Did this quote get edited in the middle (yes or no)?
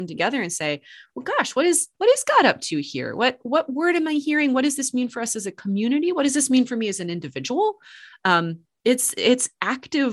yes